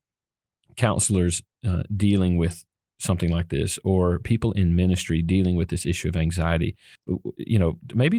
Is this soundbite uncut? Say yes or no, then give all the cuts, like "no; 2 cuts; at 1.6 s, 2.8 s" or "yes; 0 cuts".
yes; 0 cuts